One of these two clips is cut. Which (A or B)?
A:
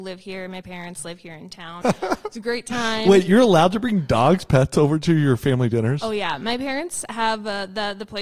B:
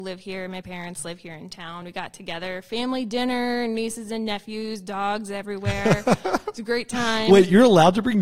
A